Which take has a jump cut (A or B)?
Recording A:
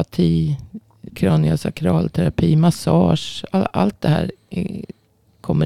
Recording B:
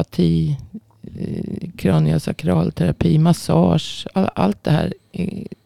A